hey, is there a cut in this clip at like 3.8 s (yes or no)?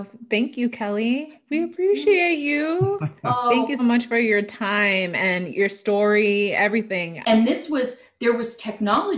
yes